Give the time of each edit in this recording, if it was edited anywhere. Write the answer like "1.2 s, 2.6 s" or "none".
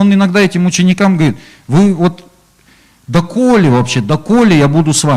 none